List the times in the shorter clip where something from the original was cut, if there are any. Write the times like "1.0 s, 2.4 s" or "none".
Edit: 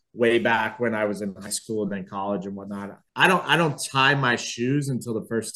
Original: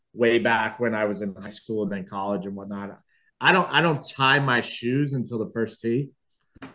3.1 s